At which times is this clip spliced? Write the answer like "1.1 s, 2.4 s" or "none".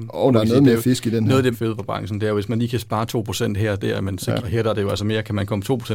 1.5 s, 4.4 s